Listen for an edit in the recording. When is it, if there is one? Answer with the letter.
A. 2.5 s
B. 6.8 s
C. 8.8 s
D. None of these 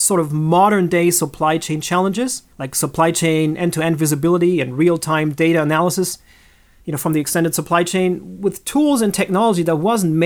A